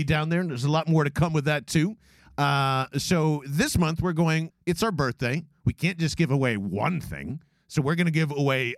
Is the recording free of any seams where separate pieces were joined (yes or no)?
no